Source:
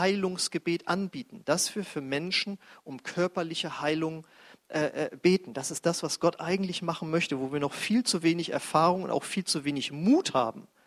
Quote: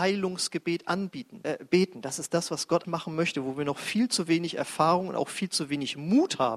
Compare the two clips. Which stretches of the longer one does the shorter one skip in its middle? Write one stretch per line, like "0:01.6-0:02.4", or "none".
0:01.4-0:05.0
0:06.4-0:06.8